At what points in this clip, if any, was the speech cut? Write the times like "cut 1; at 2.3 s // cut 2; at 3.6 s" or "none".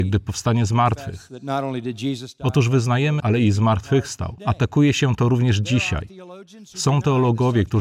cut 1; at 3.2 s // cut 2; at 4.4 s